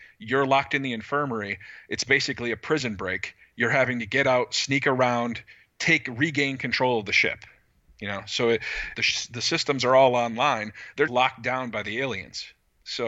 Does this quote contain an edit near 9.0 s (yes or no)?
yes